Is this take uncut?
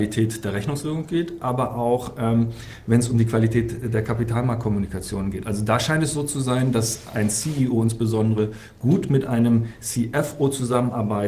no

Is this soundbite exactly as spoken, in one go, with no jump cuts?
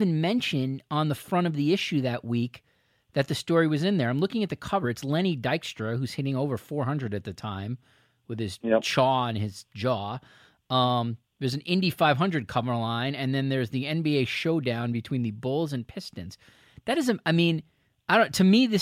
yes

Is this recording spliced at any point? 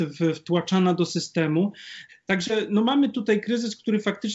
yes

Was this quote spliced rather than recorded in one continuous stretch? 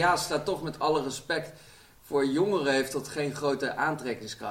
no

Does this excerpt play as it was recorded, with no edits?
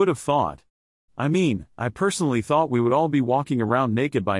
yes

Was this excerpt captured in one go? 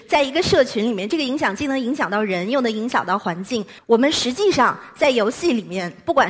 no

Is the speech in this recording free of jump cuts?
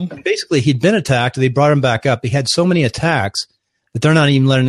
yes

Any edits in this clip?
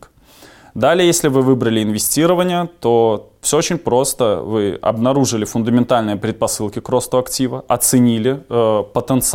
no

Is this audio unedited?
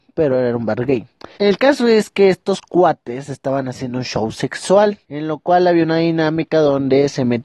no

